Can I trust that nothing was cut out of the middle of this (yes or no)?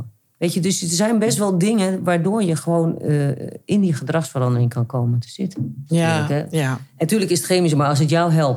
no